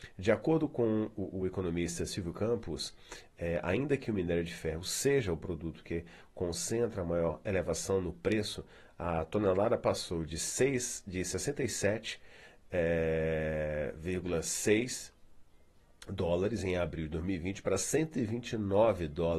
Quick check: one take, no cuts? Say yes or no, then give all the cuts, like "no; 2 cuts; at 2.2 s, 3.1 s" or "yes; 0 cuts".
yes; 0 cuts